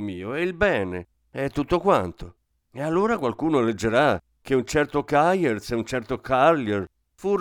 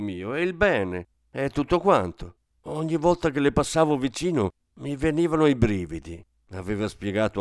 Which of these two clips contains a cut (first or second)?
second